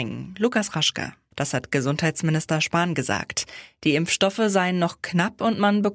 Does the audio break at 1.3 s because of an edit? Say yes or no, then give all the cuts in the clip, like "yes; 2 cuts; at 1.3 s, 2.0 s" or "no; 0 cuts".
yes; 1 cut; at 1.3 s